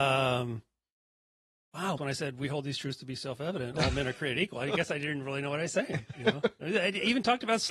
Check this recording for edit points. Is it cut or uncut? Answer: cut